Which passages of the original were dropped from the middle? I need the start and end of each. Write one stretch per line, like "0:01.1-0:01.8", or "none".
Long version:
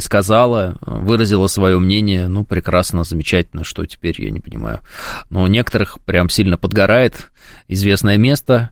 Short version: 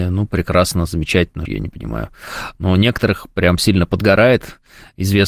0:03.6-0:04.2